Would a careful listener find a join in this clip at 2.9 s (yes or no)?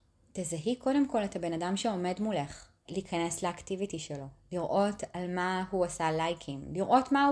yes